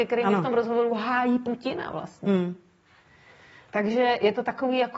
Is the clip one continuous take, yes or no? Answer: yes